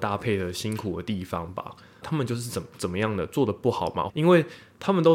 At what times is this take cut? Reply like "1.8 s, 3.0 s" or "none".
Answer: 2.0 s, 4.1 s